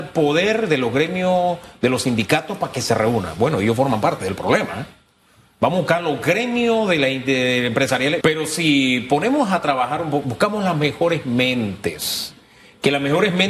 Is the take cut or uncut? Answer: cut